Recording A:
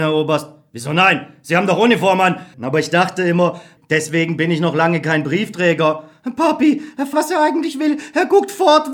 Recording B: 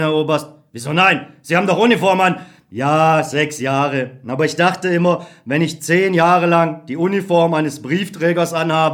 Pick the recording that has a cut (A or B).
A